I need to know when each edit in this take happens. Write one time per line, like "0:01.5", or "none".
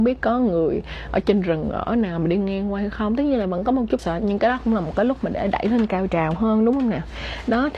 0:04.0